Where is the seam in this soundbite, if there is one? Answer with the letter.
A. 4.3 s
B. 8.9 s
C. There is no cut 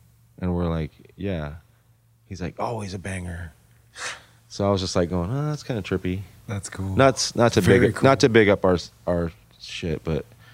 C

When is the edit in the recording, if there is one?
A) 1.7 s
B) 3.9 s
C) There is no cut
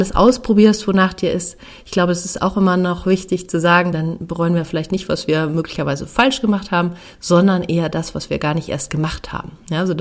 B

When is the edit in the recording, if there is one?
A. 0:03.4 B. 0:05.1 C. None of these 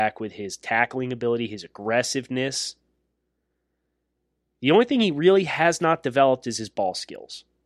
C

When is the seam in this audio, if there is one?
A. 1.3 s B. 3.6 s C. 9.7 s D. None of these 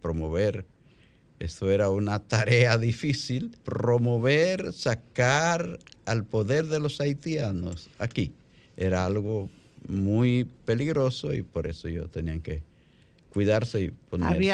B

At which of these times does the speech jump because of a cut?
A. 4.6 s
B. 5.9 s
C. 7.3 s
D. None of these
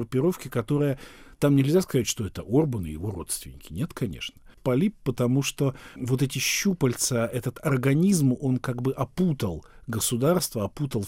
A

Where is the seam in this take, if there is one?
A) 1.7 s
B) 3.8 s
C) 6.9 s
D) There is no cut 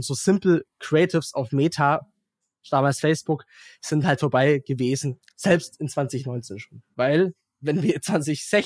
C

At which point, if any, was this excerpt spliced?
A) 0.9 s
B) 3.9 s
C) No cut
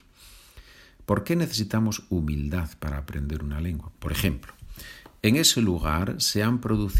B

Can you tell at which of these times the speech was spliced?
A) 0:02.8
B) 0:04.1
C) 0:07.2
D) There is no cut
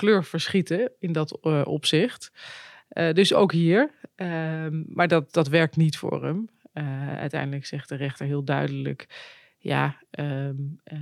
D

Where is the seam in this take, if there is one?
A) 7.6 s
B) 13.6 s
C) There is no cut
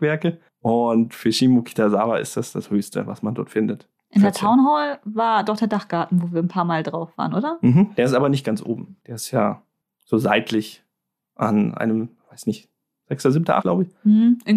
B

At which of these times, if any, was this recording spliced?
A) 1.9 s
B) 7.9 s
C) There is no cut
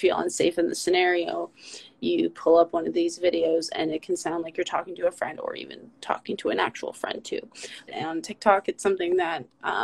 B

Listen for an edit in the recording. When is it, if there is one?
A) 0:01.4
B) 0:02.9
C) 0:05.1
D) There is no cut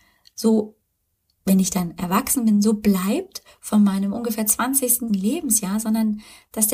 C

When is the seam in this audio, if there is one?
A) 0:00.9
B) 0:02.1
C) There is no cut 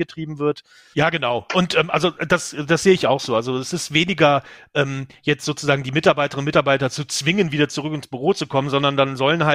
A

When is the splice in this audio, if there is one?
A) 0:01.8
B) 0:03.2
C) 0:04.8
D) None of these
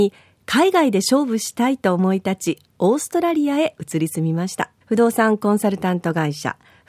C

